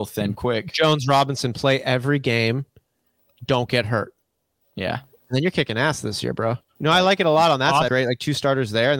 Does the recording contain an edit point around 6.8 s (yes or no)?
yes